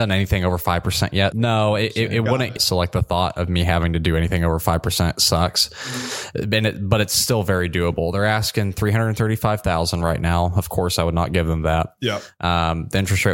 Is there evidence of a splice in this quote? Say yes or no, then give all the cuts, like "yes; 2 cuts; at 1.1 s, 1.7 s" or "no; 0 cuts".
yes; 2 cuts; at 1.3 s, 2.6 s